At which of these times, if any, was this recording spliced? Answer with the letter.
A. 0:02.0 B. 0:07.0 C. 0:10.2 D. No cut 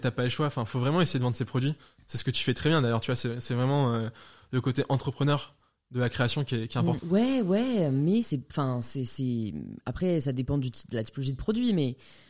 B